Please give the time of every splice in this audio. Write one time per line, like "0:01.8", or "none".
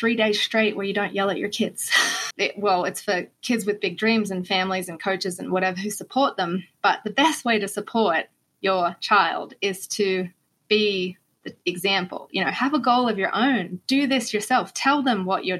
0:02.3